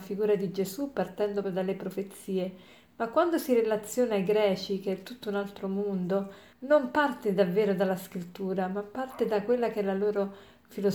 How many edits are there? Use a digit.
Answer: 2